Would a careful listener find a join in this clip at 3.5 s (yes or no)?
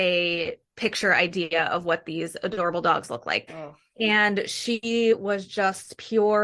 yes